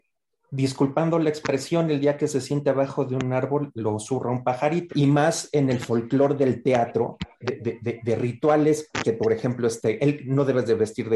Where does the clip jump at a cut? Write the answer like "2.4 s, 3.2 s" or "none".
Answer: 4.9 s, 7.4 s, 9.0 s